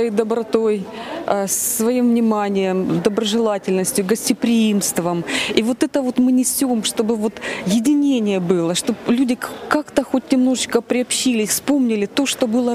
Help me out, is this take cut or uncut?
cut